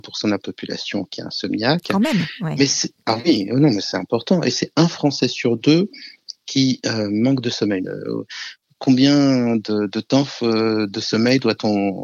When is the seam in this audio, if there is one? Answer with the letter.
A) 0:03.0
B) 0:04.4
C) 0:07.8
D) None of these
C